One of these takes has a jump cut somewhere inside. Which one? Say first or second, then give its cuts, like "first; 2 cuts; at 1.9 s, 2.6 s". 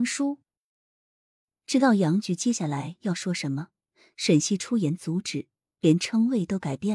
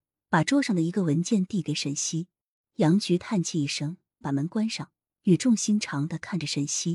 second; 2 cuts; at 2.6 s, 4.2 s